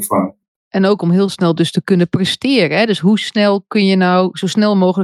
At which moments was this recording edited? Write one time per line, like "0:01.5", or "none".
none